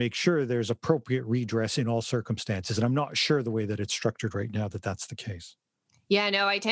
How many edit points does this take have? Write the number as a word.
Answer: zero